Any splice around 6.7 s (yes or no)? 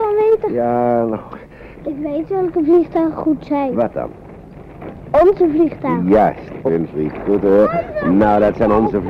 yes